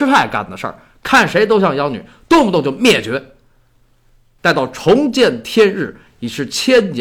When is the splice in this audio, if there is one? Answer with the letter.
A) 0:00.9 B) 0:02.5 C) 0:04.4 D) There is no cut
C